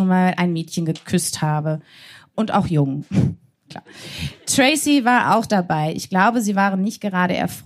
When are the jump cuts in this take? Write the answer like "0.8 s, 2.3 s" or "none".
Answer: none